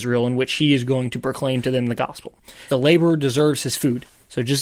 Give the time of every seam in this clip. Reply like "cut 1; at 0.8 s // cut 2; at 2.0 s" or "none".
cut 1; at 2.7 s